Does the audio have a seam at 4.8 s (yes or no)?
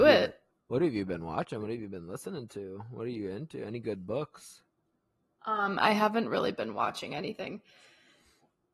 no